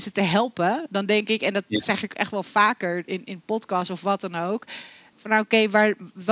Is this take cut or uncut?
cut